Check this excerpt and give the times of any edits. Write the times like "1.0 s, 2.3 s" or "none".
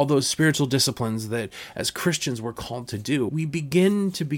3.3 s